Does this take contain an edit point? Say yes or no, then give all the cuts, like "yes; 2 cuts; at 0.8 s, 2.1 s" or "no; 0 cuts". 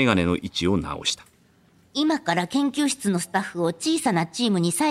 no; 0 cuts